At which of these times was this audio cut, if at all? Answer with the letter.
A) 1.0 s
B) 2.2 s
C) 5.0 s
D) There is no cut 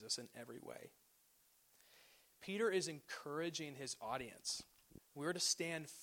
C